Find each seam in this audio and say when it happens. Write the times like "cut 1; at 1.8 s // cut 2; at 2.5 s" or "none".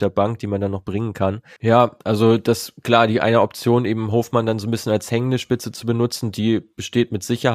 cut 1; at 1.6 s